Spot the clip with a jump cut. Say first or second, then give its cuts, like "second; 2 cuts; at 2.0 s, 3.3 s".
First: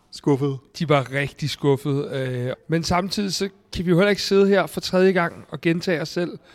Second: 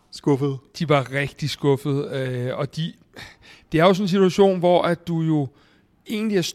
first; 1 cut; at 2.5 s